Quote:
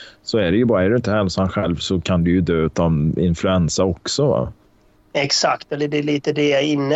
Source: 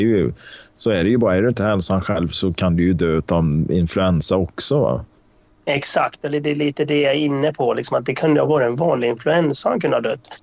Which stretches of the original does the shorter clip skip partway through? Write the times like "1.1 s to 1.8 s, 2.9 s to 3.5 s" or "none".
none